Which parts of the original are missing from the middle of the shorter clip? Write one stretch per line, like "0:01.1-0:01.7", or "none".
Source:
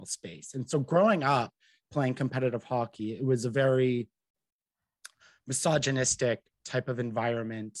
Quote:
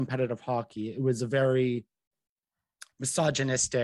0:05.1-0:05.4

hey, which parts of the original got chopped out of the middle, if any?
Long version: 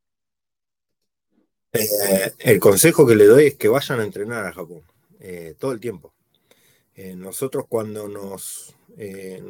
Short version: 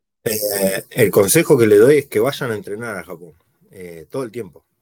none

